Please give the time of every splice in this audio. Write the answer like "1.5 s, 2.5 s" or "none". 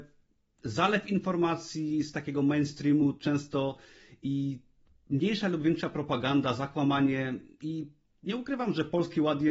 none